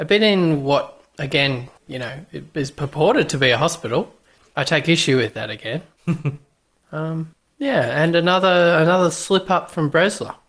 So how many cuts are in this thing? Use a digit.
1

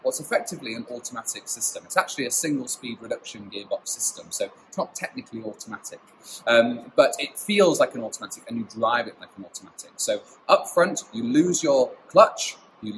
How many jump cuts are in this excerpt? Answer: 0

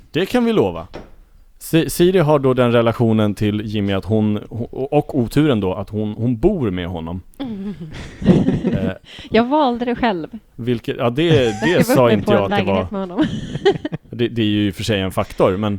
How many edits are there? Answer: 0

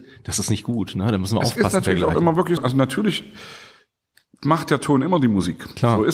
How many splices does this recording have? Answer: 1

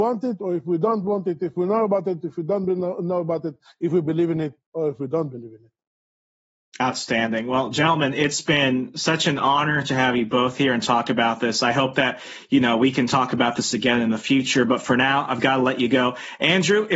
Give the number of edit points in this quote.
0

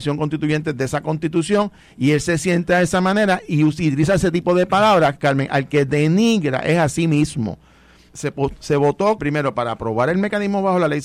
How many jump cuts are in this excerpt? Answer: 2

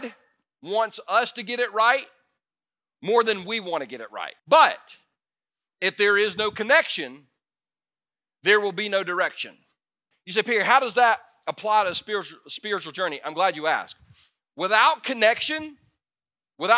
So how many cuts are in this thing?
2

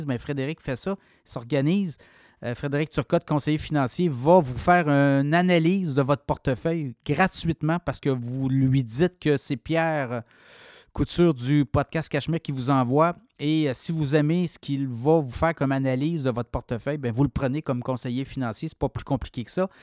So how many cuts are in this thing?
0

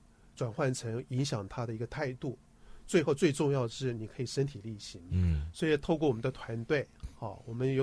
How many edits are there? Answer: 1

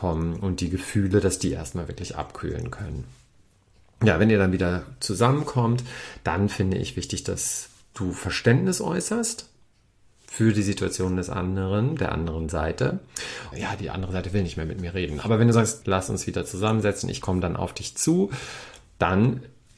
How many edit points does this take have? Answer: 2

